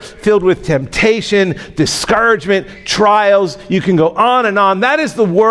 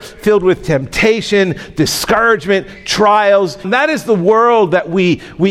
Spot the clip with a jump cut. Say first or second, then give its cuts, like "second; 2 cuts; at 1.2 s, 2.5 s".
second; 1 cut; at 3.6 s